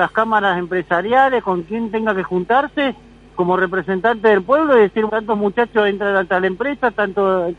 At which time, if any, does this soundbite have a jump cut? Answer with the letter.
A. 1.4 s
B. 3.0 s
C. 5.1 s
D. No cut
C